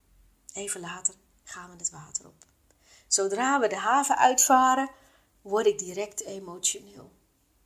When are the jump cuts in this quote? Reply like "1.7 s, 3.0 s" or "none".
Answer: none